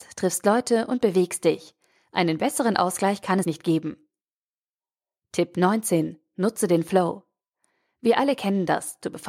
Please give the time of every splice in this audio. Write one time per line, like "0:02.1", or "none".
0:03.4